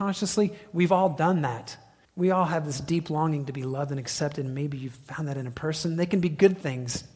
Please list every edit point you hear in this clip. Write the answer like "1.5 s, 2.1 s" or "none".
2.0 s